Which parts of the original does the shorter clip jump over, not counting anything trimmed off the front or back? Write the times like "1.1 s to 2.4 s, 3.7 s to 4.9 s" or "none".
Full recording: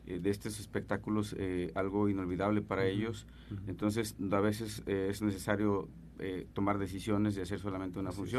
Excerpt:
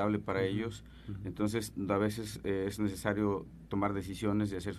6.1 s to 6.5 s